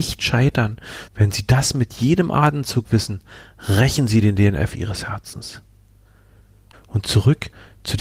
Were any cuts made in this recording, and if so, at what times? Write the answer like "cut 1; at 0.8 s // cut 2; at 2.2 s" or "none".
cut 1; at 1.1 s // cut 2; at 6.7 s